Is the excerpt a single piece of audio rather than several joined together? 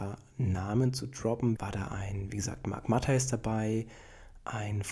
no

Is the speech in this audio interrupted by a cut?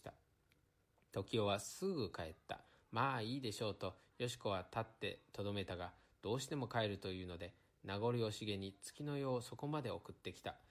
no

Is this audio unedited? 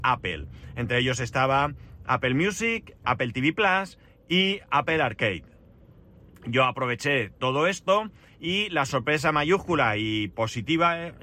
yes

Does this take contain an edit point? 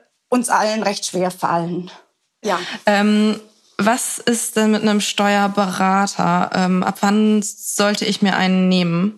yes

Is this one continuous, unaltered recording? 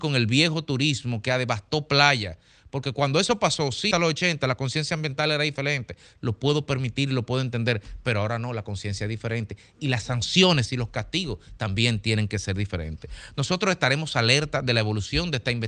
no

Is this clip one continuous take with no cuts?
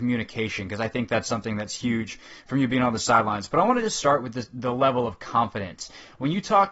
yes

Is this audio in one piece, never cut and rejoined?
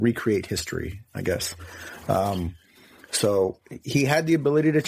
yes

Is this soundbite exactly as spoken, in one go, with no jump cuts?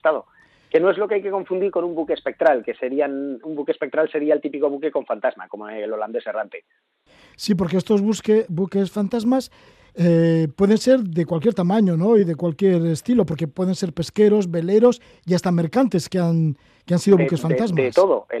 yes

